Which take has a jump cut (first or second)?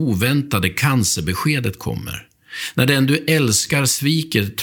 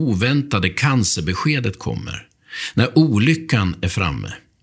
first